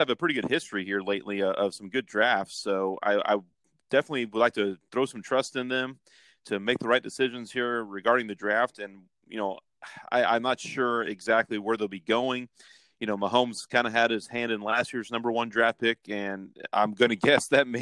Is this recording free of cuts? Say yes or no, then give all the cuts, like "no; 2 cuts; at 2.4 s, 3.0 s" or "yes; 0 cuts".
yes; 0 cuts